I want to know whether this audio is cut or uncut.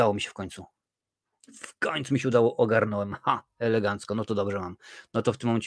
uncut